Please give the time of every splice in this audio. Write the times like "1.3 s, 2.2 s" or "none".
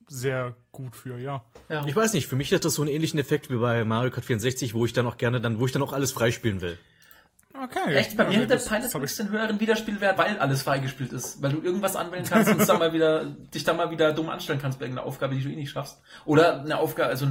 10.2 s